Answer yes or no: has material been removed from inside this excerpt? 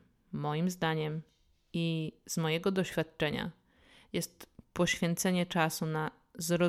no